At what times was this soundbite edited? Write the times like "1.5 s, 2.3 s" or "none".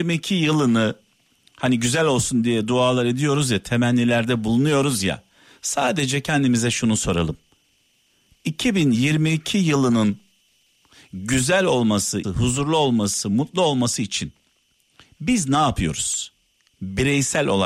12.2 s